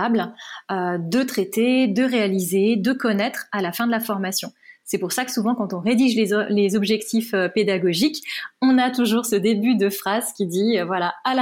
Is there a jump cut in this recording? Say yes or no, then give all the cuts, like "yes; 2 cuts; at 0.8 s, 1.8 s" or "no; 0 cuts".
no; 0 cuts